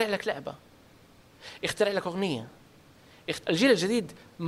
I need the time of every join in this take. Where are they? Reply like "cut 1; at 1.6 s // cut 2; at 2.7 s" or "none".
cut 1; at 3.4 s